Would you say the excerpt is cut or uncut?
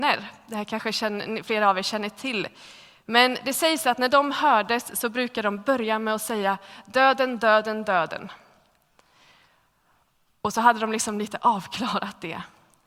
uncut